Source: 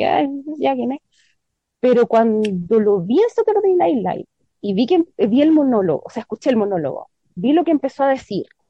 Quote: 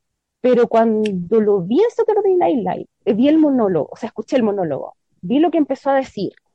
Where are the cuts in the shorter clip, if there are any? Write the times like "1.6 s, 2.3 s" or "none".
3.1 s